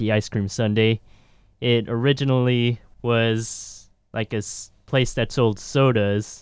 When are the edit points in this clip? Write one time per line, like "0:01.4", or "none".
0:02.9